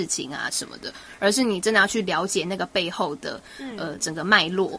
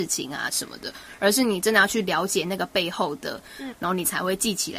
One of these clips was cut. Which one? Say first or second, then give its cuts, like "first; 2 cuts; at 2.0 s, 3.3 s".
second; 1 cut; at 3.7 s